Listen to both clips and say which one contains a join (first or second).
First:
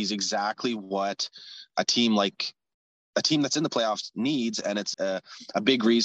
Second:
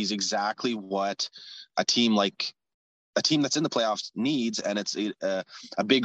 first